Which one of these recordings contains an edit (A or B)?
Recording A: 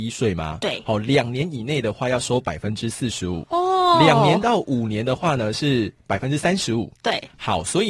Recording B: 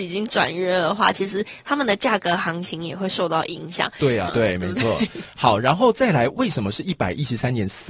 B